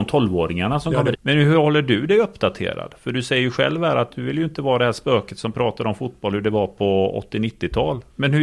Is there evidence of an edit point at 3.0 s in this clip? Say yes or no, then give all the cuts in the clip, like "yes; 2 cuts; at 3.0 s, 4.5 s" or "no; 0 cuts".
no; 1 cut; at 1.1 s